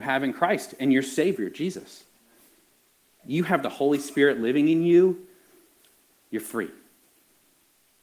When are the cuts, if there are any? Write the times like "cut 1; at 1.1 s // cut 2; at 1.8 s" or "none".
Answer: none